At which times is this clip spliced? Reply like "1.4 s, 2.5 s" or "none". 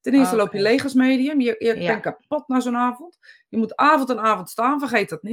none